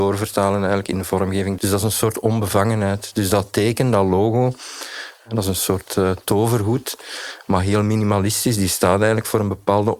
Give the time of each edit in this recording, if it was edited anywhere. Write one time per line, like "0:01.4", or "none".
0:01.6